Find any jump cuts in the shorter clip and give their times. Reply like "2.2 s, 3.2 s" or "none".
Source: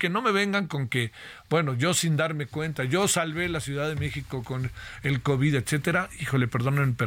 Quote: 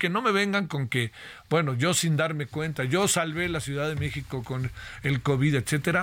none